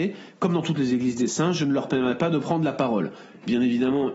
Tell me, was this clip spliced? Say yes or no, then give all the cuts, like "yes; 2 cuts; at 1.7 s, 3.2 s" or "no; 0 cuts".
no; 0 cuts